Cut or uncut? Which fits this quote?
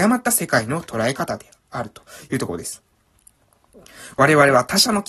uncut